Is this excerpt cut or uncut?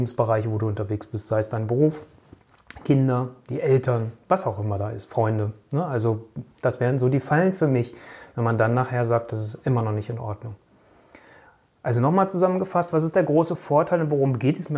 uncut